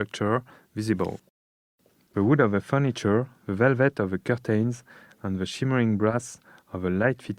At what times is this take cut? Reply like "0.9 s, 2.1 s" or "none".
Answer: none